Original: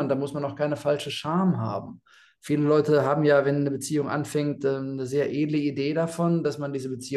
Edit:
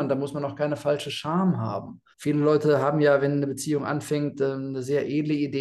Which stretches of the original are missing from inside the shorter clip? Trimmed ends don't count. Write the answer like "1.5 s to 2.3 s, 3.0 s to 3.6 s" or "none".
2.1 s to 2.3 s